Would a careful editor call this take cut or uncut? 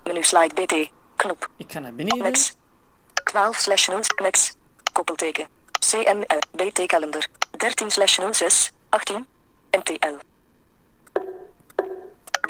uncut